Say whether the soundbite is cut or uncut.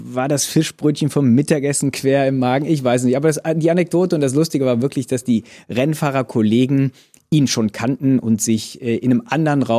uncut